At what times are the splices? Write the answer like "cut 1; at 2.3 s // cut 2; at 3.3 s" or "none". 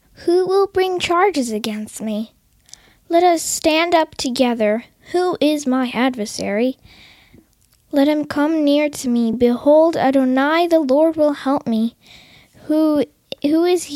none